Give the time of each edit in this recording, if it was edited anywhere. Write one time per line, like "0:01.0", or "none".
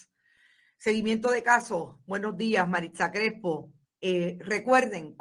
0:03.8